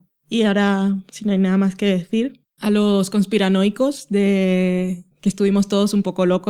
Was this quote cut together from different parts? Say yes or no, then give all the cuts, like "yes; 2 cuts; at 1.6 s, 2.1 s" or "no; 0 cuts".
yes; 1 cut; at 2.4 s